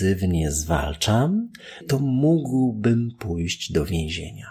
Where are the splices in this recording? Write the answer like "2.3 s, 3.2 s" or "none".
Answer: 1.8 s